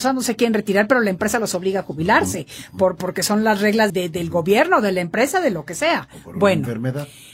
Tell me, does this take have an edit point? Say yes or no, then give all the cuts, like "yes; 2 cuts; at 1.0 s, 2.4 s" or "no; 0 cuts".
yes; 1 cut; at 3.9 s